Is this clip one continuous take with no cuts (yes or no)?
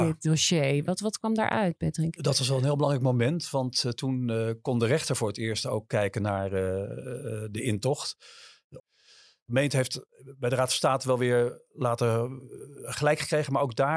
no